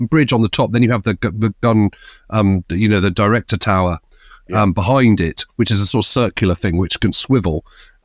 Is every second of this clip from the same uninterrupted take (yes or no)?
yes